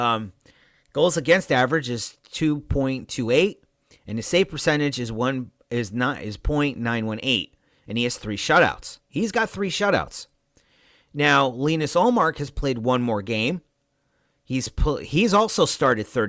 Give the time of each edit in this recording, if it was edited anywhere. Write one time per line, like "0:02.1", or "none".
none